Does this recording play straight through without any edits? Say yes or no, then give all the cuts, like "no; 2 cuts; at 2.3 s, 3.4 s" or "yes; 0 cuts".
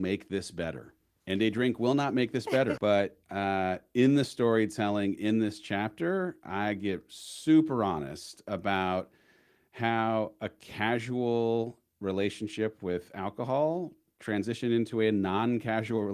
no; 1 cut; at 2.8 s